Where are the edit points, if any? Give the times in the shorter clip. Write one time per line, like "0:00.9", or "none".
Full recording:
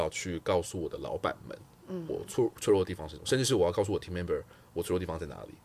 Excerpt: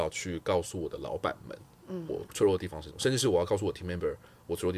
0:02.3